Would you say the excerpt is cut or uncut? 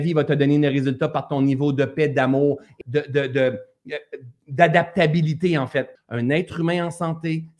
cut